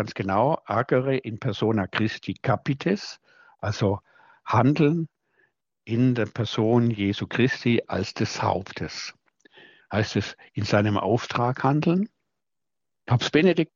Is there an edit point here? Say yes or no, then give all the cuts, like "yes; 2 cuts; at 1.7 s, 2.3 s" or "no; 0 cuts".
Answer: yes; 1 cut; at 9.8 s